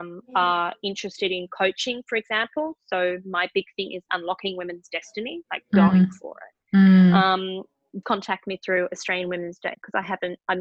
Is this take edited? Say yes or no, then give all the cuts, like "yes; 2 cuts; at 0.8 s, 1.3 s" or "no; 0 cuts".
yes; 1 cut; at 8.0 s